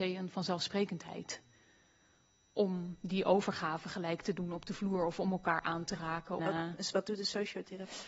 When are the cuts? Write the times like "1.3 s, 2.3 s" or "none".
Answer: 6.4 s

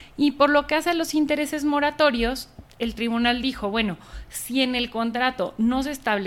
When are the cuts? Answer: none

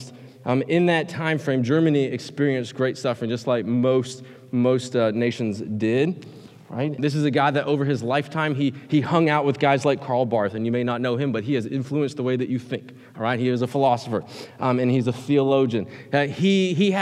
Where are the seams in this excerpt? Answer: 7.0 s

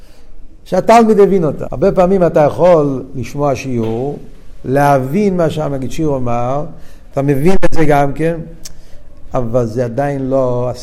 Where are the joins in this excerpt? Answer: 1.7 s, 7.1 s

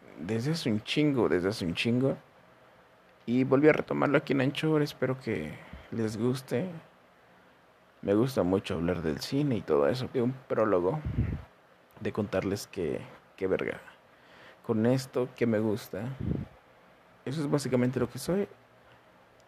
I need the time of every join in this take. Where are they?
10.1 s, 15.3 s, 17.1 s

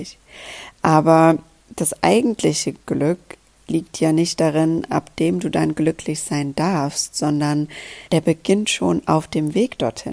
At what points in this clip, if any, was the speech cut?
4.9 s, 8.1 s

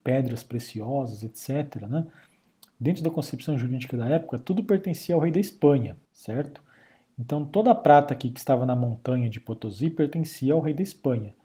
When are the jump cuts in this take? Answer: 6.1 s

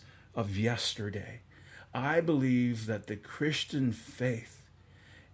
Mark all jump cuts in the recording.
none

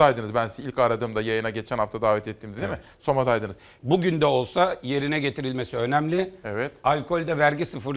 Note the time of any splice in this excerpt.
3.8 s

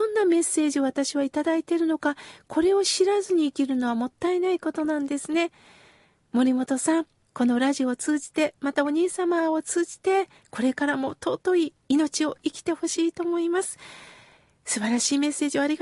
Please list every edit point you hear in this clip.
7.2 s

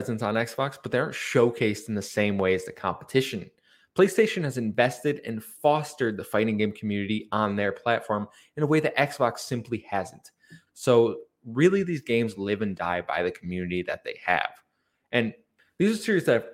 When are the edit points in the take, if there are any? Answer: 10.7 s

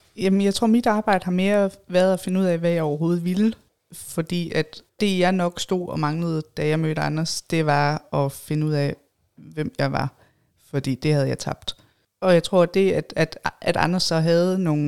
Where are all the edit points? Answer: none

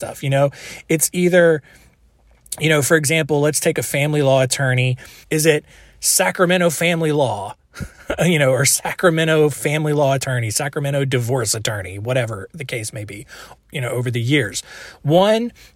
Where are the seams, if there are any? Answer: 5.2 s, 13.6 s

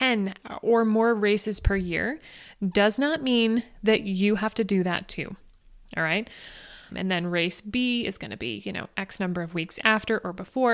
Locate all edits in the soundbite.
6.9 s

